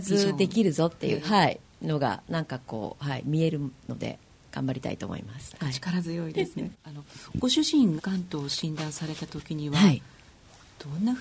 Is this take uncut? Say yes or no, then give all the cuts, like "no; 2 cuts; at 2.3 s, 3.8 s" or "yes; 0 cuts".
no; 2 cuts; at 6.7 s, 8.0 s